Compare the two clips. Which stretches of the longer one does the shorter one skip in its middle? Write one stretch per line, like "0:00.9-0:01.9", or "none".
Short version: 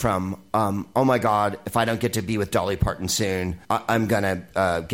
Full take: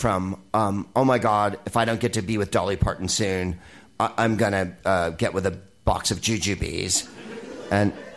0:03.6-0:03.9